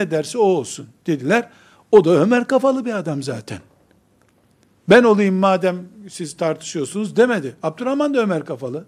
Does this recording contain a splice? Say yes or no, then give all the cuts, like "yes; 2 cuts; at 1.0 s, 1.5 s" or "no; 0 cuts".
no; 0 cuts